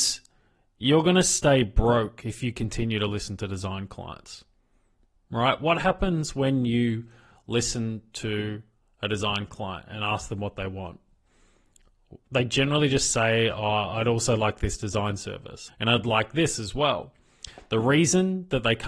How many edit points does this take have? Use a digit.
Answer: 1